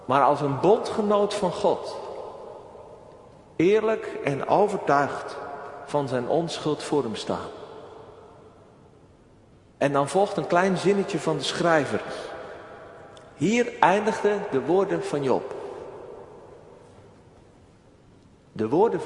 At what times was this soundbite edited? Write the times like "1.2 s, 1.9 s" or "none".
none